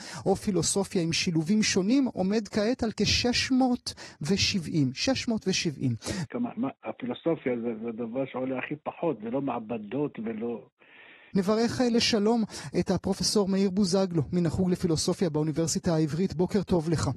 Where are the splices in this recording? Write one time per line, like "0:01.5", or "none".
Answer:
0:06.3
0:11.3

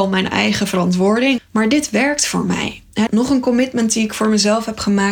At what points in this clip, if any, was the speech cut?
0:01.4
0:03.1

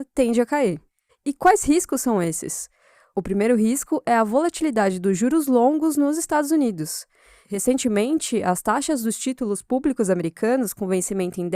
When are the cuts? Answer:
0:01.1

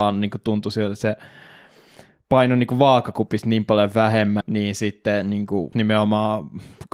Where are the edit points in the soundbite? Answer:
0:04.4
0:05.7

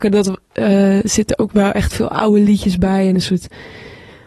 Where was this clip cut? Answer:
none

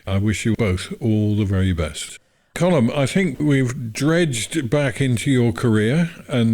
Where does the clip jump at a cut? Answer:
0:02.5

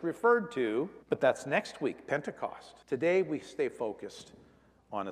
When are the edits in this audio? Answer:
0:01.0
0:02.8

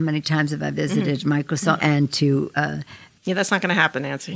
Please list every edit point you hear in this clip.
0:01.8

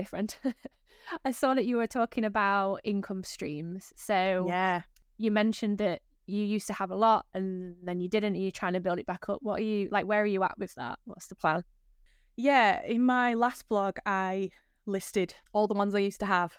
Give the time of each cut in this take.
none

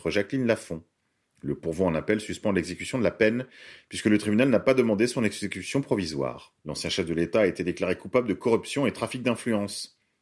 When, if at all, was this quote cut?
0:06.6

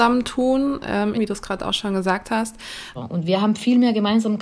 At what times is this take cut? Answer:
0:01.1
0:03.0

